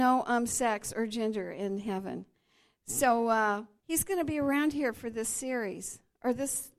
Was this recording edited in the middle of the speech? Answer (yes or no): yes